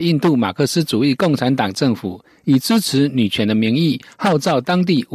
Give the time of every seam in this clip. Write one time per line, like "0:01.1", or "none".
none